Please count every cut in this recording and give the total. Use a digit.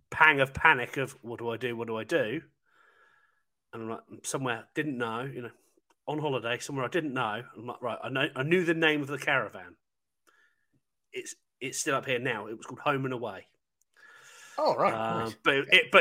0